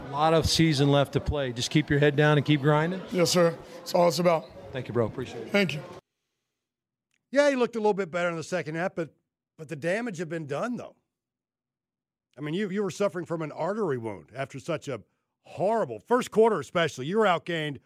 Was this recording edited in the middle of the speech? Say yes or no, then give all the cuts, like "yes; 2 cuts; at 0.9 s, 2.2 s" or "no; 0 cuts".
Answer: no; 0 cuts